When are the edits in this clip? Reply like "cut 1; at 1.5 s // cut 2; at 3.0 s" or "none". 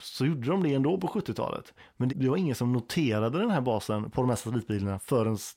cut 1; at 2.1 s